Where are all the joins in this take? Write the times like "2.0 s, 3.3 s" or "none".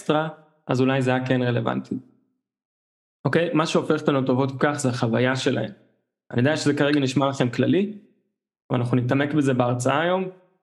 3.1 s